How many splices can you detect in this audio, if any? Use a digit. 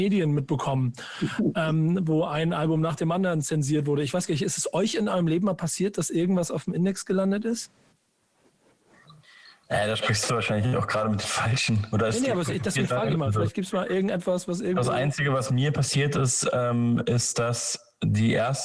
0